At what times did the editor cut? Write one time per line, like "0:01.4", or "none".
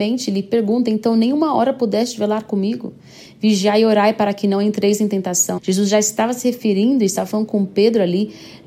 0:05.6